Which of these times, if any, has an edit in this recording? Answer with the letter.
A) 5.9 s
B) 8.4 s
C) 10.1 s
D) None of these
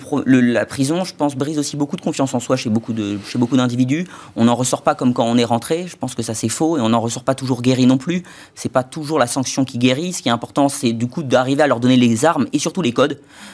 D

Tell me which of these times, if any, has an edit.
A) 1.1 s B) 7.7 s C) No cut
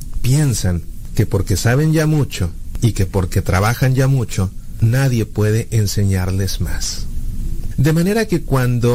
B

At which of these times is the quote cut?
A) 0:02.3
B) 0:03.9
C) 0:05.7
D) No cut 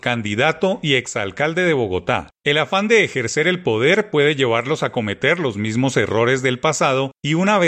A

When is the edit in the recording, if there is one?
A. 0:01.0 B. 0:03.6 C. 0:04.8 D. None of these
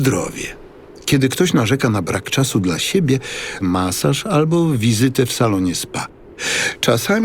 B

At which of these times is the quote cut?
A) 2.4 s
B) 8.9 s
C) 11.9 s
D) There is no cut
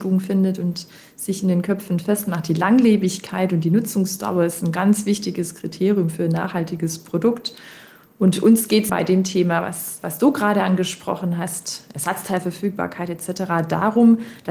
B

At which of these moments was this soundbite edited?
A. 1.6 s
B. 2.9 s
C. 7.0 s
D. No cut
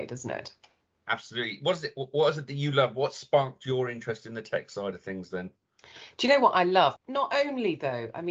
C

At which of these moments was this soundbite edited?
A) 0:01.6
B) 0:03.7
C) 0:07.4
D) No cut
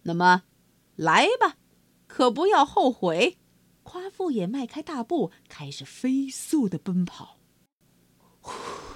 B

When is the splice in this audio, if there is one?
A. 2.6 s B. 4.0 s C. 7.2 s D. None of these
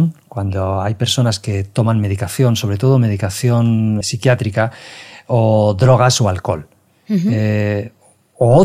B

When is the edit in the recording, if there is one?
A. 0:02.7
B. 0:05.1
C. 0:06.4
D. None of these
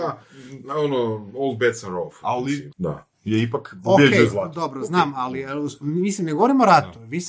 A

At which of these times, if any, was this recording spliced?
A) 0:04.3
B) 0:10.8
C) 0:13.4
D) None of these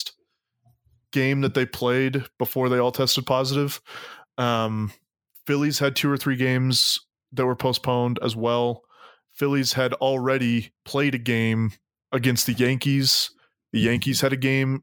B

